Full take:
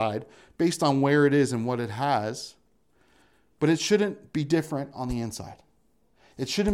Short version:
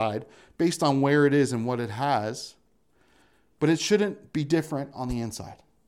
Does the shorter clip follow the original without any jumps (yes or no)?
yes